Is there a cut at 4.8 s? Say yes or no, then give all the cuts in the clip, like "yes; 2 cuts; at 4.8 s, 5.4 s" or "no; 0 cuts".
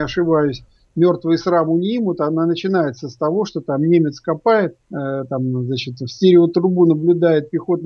yes; 1 cut; at 4.8 s